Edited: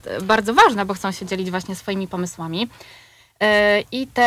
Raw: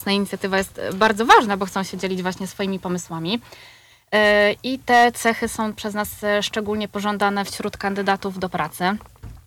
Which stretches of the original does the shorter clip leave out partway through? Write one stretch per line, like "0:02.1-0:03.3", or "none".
none